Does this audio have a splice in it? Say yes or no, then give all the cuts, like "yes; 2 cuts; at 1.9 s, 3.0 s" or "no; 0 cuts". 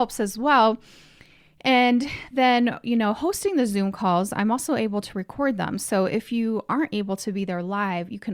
no; 0 cuts